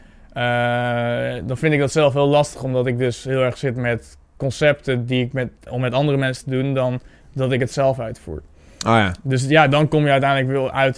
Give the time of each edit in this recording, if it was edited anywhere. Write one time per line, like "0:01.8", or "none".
0:05.7

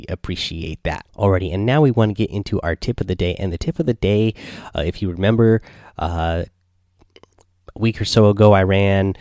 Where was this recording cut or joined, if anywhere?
0:01.1

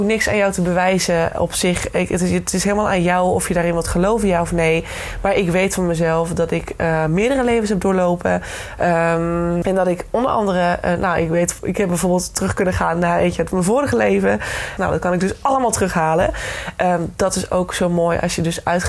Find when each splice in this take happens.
0:09.6
0:14.8

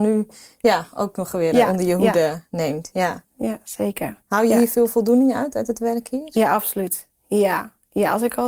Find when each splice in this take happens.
none

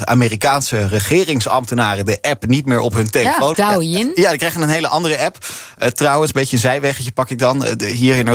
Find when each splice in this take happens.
0:03.5

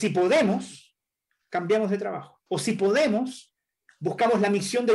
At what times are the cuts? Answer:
0:02.5

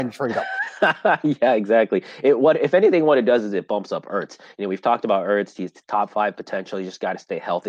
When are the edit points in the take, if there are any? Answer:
none

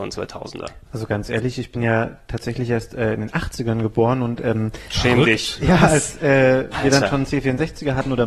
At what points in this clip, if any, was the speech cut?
none

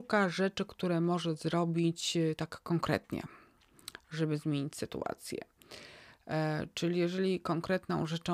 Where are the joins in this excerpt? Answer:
none

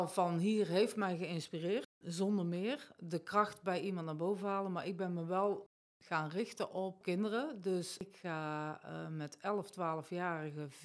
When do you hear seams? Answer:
none

